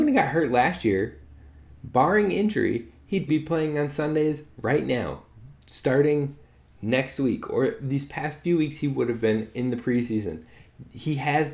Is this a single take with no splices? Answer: no; 1 cut; at 3.3 s

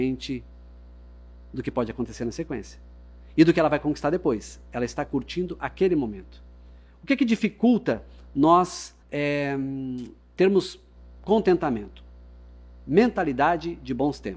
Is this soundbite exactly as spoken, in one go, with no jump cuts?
no; 1 cut; at 9.0 s

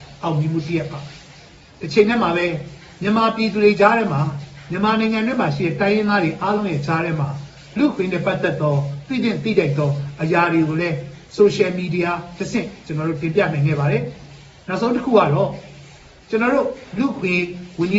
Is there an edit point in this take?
no; 0 cuts

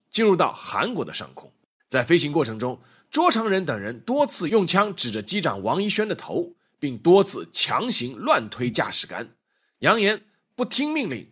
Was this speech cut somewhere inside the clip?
yes; 1 cut; at 1.8 s

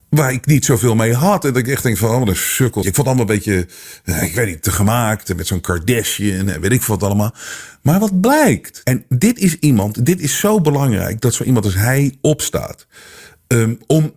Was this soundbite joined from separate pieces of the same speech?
yes; 2 cuts; at 2.8 s, 8.8 s

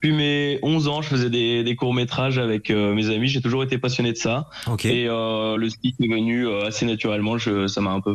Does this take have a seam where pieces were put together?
no; 0 cuts

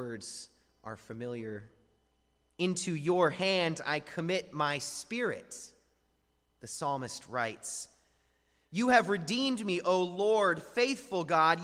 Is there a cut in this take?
no; 0 cuts

